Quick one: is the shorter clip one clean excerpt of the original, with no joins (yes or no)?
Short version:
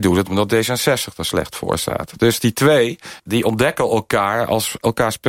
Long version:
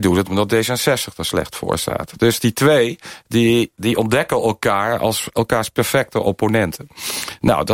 no